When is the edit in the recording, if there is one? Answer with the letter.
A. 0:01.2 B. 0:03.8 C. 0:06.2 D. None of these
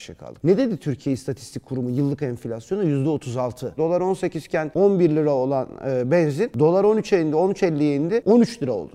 B